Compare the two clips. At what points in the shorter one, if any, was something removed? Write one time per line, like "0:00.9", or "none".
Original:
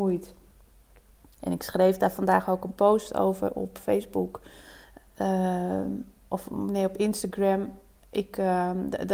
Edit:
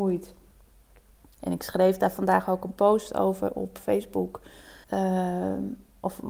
0:04.8

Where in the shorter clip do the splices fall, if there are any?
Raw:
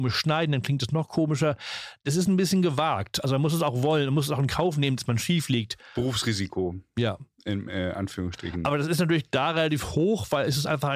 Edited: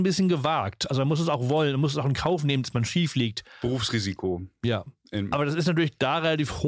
0:05.3

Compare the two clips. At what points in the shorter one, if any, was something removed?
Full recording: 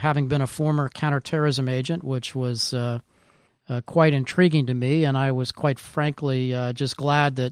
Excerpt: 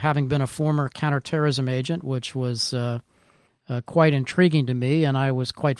none

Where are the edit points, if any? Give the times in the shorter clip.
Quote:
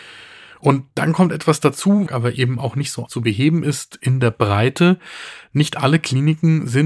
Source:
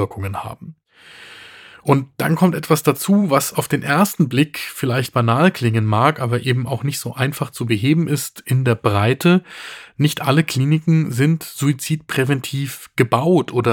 0:02.1
0:03.1

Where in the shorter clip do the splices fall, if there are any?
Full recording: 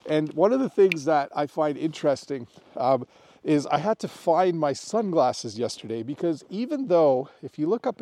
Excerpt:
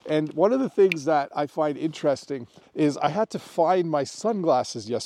0:02.6

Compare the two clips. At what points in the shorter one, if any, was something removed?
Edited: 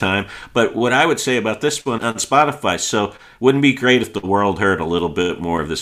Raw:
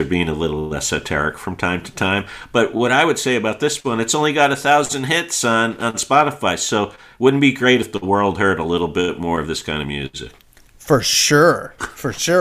0:02.0

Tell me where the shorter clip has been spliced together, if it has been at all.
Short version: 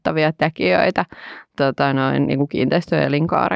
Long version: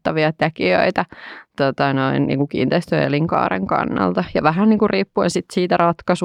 none

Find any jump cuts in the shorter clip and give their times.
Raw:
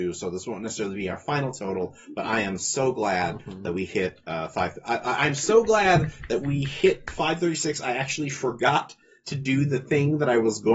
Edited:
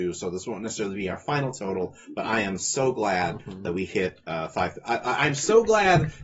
none

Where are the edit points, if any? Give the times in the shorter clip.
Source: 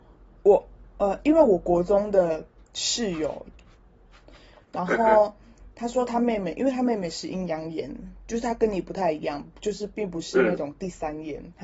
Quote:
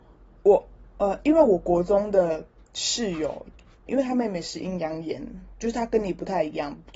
0:03.9

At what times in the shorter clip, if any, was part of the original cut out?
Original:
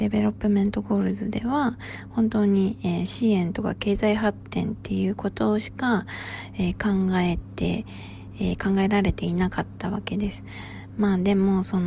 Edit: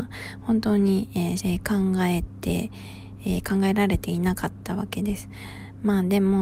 0:01.4

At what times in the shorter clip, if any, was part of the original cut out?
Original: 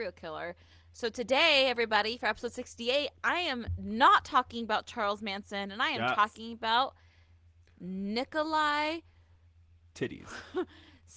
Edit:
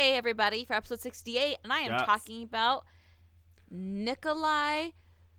0:01.6

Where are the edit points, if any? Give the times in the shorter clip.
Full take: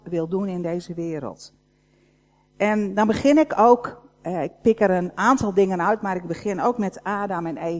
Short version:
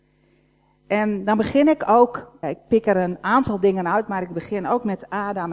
0:02.4

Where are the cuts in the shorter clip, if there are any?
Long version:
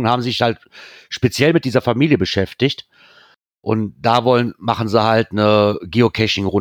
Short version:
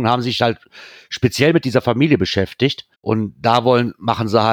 0:02.9

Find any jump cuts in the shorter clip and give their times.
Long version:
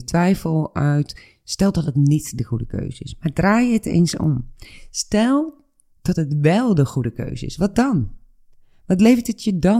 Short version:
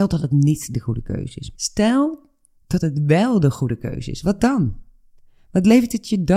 0:01.6

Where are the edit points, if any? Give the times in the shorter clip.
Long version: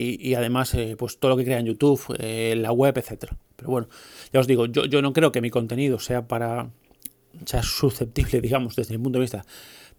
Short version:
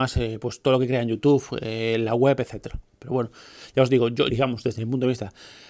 0:04.3

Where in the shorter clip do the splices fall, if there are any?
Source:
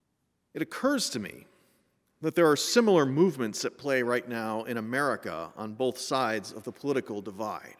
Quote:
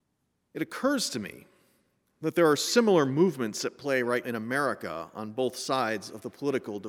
0:04.2

